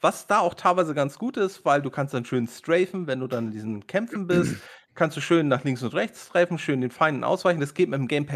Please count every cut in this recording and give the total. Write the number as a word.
zero